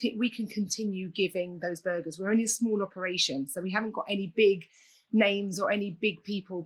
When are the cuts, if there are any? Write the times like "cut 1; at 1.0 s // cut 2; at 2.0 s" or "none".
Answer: none